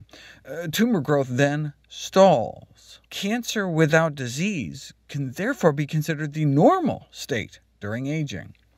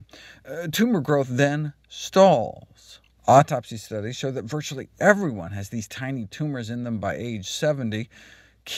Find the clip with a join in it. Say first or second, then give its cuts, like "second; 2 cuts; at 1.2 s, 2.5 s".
first; 1 cut; at 3.1 s